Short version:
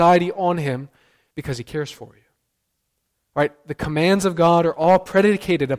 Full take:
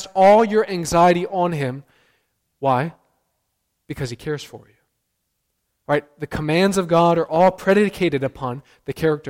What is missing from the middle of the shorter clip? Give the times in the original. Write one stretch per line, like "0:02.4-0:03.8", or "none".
0:02.3-0:03.8